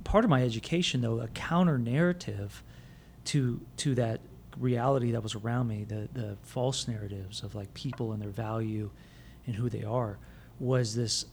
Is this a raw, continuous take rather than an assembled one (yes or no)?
no